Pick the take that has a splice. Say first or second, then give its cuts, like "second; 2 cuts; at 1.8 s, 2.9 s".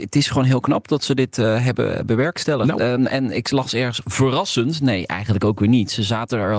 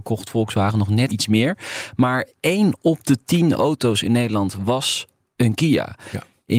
second; 1 cut; at 1.1 s